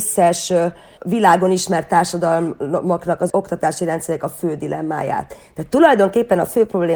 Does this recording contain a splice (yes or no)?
no